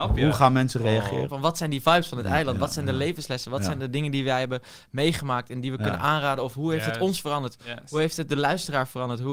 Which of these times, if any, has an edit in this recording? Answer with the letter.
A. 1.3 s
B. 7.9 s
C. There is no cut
A